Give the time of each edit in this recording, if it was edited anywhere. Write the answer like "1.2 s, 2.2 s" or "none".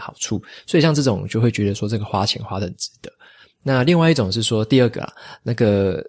none